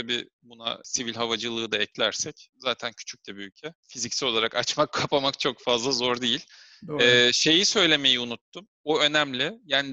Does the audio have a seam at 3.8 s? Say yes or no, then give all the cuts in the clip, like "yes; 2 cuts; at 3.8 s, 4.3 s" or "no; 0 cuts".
yes; 1 cut; at 3.8 s